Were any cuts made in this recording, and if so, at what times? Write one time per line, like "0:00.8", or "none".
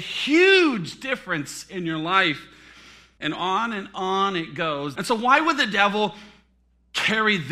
0:03.2
0:04.9